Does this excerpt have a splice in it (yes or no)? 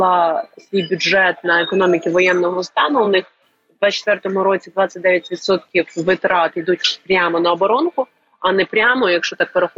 no